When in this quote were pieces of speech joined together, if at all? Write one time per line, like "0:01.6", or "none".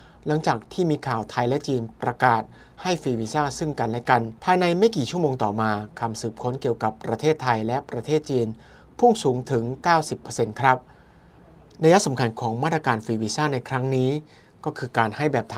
0:04.4